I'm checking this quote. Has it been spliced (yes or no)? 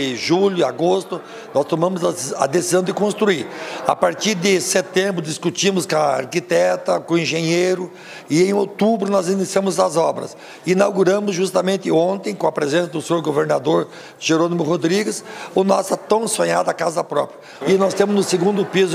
yes